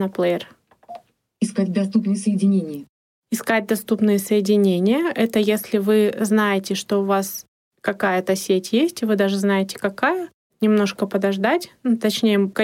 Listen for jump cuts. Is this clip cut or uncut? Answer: cut